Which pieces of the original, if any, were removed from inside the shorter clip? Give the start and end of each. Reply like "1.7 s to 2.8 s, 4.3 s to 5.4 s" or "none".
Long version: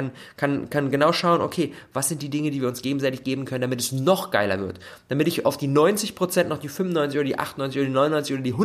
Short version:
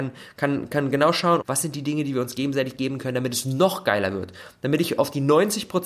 1.4 s to 1.9 s